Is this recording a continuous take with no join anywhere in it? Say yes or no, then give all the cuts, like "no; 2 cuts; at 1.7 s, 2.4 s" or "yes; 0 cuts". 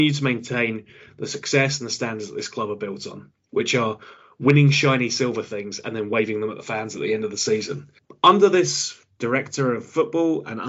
yes; 0 cuts